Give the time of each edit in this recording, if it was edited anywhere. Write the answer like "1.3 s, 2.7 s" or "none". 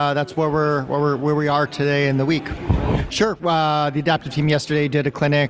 3.1 s